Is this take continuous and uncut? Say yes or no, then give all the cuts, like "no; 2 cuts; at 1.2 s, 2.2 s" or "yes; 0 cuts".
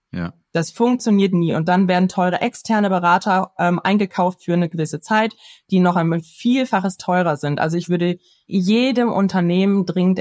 yes; 0 cuts